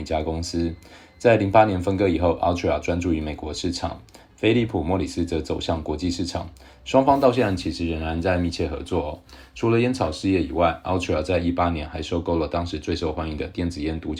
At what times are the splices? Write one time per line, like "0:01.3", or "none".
none